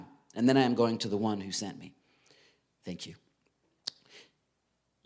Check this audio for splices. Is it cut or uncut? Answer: uncut